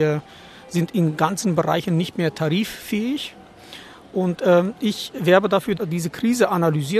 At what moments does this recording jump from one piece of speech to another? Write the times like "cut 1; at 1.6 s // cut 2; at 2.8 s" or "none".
cut 1; at 5.8 s